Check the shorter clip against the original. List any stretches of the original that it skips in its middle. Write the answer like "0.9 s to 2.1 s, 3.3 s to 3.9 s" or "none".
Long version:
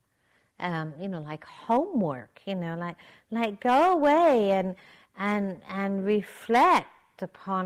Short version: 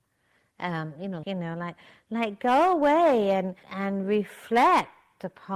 1.2 s to 2.4 s, 4.8 s to 5.6 s